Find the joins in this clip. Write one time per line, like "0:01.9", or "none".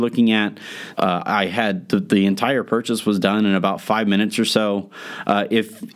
0:00.9